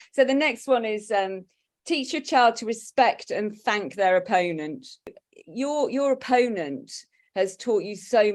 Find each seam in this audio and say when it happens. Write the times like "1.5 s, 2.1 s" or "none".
none